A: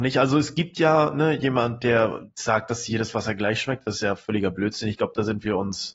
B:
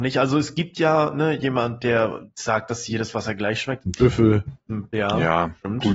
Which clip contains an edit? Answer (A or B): B